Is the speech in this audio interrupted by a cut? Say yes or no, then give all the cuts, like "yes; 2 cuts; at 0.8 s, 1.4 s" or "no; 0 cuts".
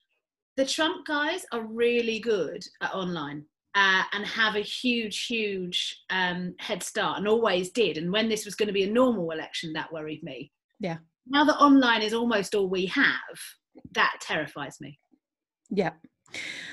yes; 1 cut; at 3.6 s